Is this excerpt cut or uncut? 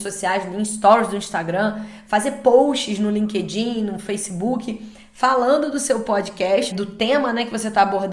cut